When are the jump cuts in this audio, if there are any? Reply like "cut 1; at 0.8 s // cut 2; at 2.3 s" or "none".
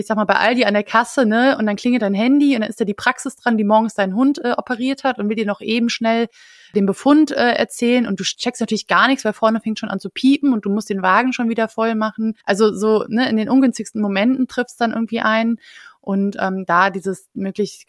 cut 1; at 12.4 s